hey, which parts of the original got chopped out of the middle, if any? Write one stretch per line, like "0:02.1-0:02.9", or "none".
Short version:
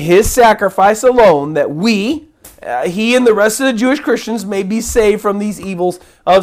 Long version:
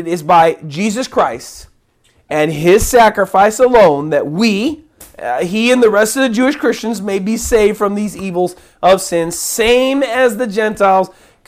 none